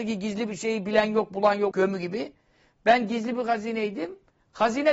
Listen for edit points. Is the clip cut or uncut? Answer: cut